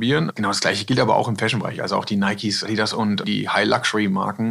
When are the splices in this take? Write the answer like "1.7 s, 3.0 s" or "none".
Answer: none